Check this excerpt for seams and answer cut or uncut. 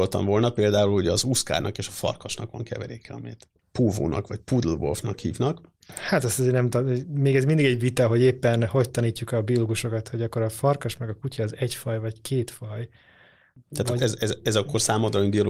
cut